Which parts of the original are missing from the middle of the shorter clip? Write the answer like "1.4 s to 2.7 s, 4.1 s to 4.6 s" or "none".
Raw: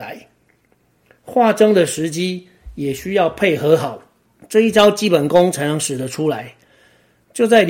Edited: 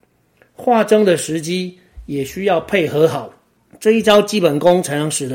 none